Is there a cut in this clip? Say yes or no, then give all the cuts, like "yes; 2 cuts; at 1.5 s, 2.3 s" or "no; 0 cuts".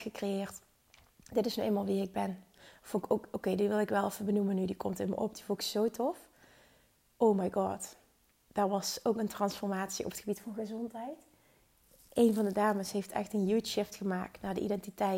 no; 0 cuts